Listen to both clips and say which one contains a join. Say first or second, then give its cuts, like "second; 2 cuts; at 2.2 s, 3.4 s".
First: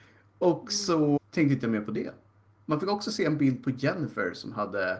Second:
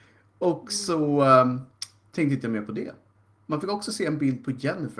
first; 1 cut; at 1.2 s